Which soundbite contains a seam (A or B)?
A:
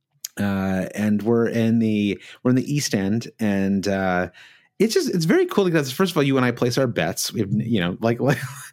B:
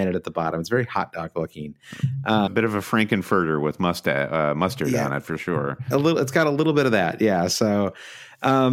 B